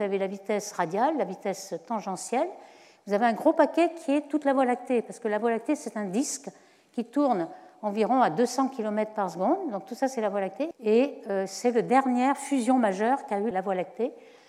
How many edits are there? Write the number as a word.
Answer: two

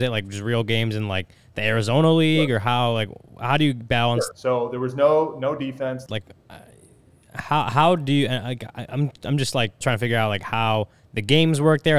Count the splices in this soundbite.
three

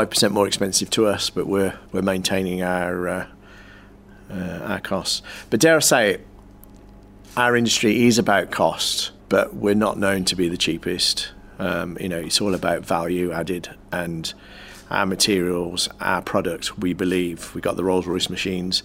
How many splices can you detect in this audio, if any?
two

